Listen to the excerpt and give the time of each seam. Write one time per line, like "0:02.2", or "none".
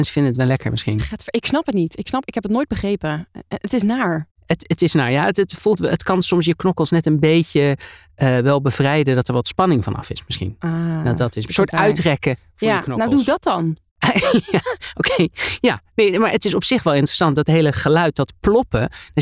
none